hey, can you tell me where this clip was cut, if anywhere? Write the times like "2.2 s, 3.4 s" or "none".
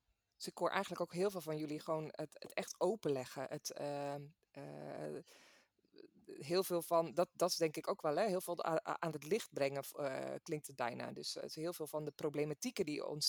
2.4 s